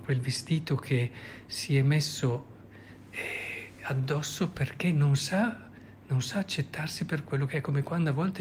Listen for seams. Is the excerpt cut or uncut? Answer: uncut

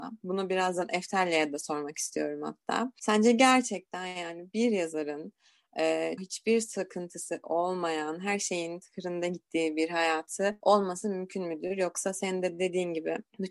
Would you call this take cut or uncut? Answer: cut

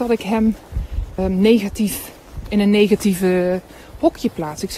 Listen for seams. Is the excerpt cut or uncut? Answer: cut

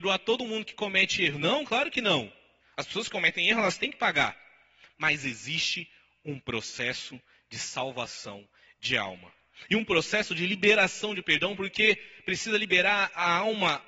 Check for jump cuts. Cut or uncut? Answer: cut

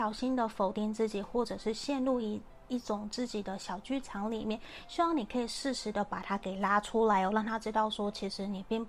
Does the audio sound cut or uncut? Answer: uncut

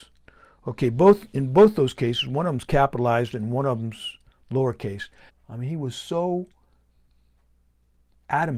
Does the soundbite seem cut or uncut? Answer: cut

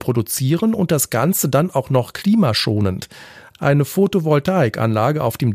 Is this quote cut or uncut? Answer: uncut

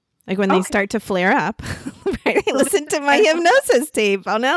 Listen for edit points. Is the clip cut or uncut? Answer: uncut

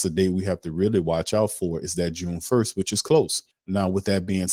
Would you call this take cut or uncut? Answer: cut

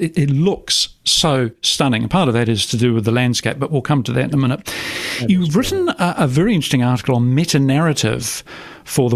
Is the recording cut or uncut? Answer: uncut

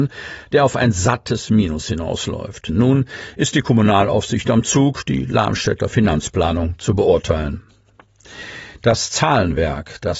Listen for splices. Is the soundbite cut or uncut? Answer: cut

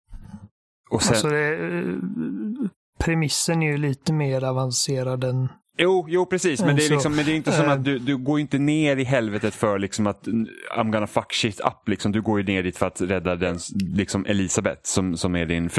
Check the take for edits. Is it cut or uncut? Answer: uncut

